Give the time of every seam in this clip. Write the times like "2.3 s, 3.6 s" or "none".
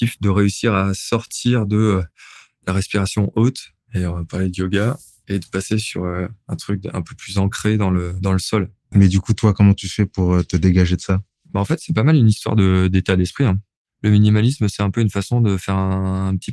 8.9 s